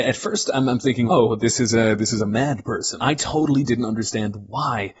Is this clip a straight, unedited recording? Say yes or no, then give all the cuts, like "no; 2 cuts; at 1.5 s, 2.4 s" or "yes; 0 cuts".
no; 2 cuts; at 1.1 s, 3.0 s